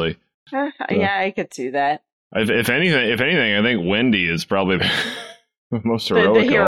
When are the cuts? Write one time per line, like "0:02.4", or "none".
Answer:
none